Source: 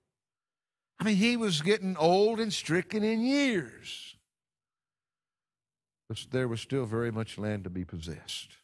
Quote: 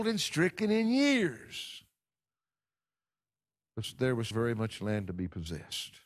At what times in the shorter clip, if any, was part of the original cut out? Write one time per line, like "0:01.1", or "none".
0:04.3